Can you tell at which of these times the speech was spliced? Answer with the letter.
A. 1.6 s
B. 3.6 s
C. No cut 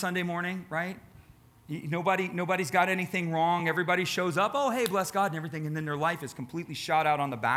C